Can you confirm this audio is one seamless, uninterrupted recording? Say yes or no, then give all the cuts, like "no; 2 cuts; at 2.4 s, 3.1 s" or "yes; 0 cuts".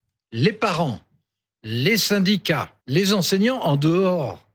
no; 1 cut; at 2.8 s